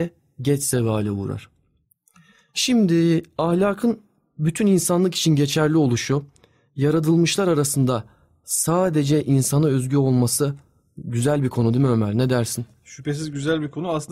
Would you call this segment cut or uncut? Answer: uncut